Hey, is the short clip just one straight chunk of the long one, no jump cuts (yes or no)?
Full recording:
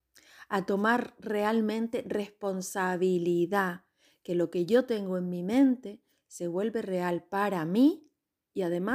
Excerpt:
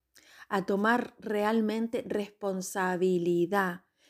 yes